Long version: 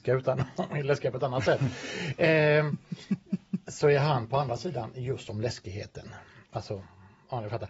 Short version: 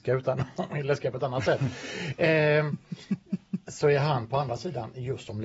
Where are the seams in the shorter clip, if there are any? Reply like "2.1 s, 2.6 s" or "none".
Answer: none